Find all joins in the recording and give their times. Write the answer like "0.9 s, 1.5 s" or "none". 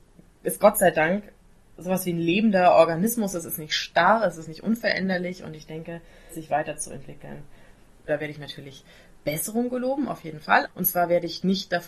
6.3 s, 8.1 s, 10.6 s